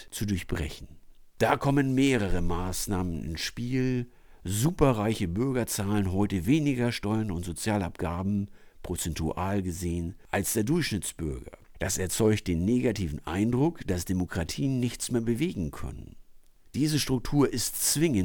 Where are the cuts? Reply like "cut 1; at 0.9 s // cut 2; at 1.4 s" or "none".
cut 1; at 11.7 s

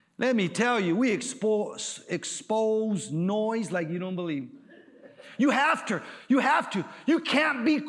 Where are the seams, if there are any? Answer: none

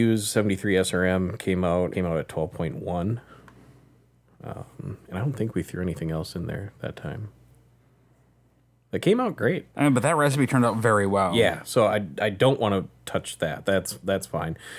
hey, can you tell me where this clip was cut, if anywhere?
cut 1; at 1.9 s // cut 2; at 9.7 s

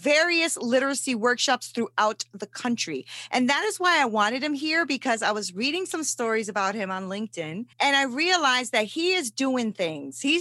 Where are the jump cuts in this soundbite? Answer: cut 1; at 7.7 s

